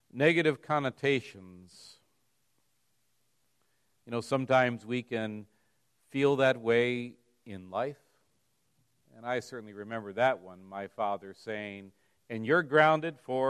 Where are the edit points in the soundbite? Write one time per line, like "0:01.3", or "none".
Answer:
0:09.0